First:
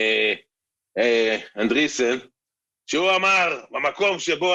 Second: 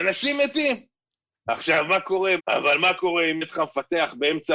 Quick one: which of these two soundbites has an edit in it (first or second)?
second